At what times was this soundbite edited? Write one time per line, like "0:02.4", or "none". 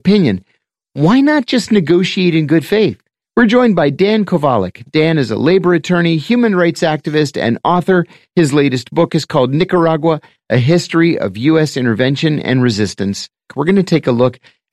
0:03.2
0:13.5